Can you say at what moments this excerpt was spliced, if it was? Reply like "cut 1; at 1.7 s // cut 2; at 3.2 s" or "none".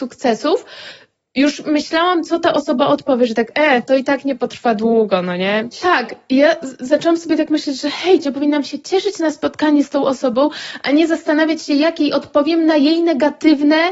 cut 1; at 5.7 s // cut 2; at 8.2 s